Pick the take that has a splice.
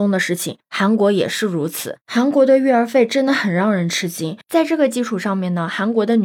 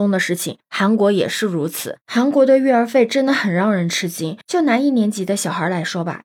first; 1 cut; at 4.4 s

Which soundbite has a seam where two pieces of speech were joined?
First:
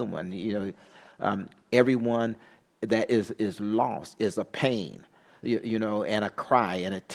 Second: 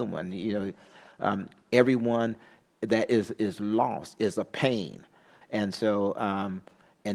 second; 1 cut; at 5.4 s

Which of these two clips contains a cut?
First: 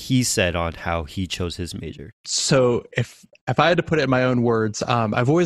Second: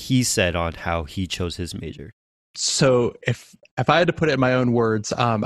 first; 1 cut; at 2.2 s

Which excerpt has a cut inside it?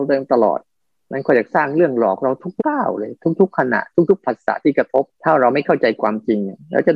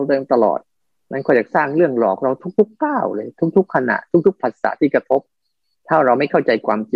first; 2 cuts; at 2.6 s, 5.1 s

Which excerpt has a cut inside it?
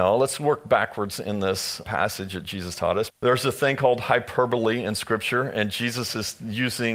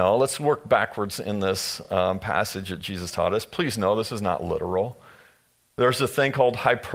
first; 2 cuts; at 1.8 s, 3.1 s

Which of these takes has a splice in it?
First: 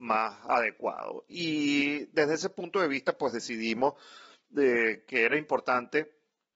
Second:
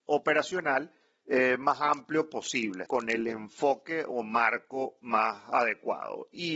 second; 2 cuts; at 1.2 s, 2.9 s

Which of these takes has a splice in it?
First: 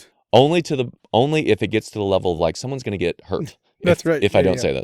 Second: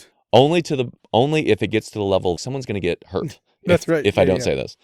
second; 1 cut; at 2.4 s

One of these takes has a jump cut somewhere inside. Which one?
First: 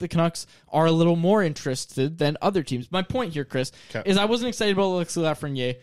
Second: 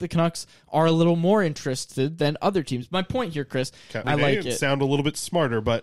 second; 1 cut; at 4.0 s

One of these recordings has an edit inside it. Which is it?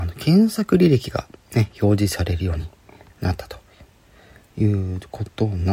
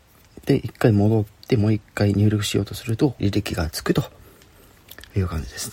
second; 1 cut; at 3.2 s

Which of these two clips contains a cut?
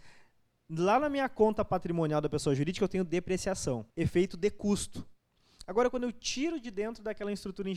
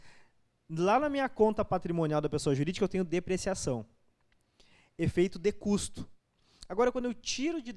first; 1 cut; at 3.9 s

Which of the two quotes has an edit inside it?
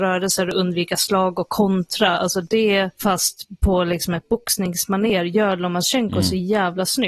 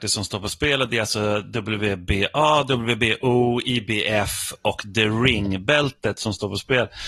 first; 1 cut; at 2.9 s

